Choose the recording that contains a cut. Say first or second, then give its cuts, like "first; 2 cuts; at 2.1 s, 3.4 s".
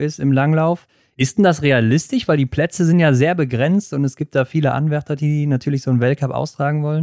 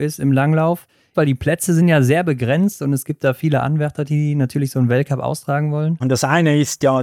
second; 2 cuts; at 1.1 s, 6.0 s